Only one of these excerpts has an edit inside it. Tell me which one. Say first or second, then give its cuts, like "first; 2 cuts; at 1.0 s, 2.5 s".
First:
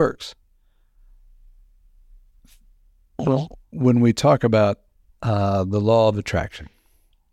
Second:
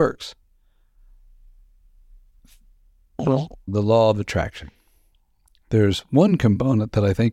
second; 1 cut; at 3.7 s